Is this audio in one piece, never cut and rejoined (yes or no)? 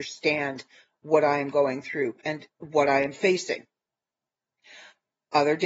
no